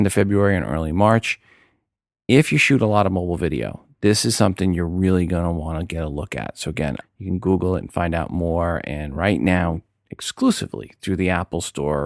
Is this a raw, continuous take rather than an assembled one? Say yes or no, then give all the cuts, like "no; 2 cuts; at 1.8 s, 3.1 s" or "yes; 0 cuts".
no; 1 cut; at 7.0 s